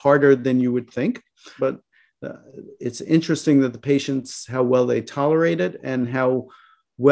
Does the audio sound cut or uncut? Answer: cut